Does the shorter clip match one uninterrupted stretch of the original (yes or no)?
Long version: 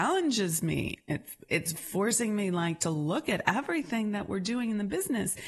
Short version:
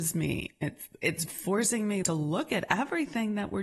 no